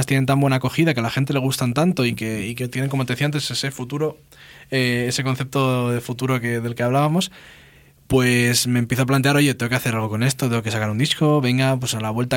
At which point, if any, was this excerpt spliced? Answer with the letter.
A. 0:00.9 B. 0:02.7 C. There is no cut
B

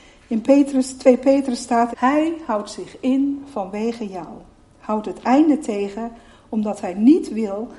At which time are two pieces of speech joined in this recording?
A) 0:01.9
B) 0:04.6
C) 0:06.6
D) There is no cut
A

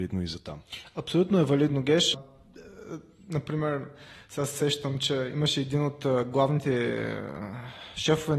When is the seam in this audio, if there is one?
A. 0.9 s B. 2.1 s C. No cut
B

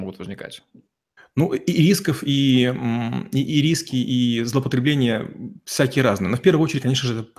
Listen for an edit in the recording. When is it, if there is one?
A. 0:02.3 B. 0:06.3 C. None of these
C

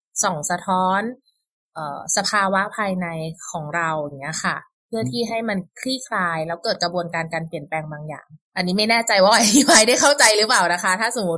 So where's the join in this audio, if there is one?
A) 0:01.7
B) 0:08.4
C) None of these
B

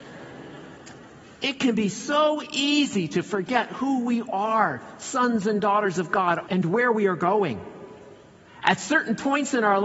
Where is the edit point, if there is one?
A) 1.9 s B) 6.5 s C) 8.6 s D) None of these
B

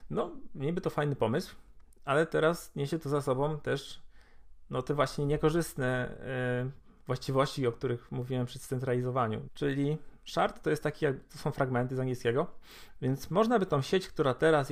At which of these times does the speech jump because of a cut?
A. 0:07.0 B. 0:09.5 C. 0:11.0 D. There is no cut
B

